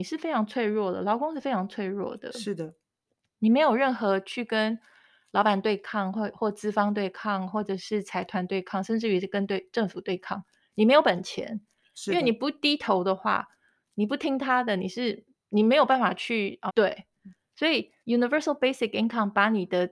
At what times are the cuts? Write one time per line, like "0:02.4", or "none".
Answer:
0:16.7
0:18.0